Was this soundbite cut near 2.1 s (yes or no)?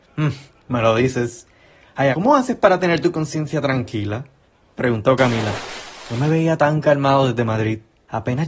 yes